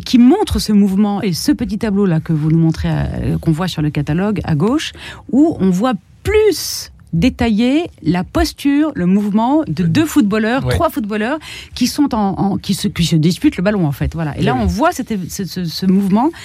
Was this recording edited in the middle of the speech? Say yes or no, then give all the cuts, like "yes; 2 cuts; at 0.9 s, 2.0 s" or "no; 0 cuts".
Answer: yes; 1 cut; at 1.2 s